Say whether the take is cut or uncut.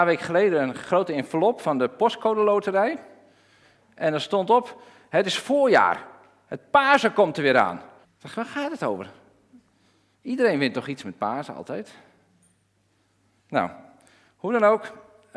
cut